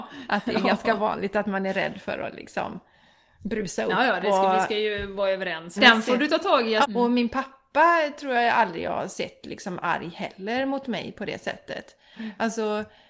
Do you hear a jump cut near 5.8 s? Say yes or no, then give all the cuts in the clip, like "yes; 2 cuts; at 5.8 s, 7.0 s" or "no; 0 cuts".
yes; 2 cuts; at 5.8 s, 6.8 s